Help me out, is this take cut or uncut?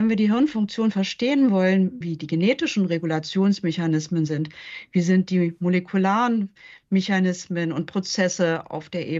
cut